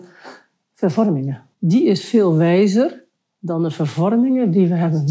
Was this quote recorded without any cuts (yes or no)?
no